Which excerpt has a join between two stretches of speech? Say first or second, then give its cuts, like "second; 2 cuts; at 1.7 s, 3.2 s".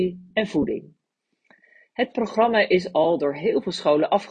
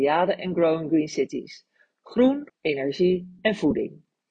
second; 1 cut; at 2.5 s